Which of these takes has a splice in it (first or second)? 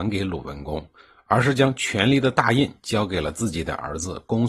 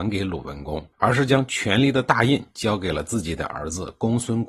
second